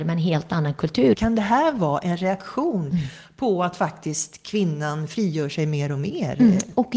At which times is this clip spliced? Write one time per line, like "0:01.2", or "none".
0:01.1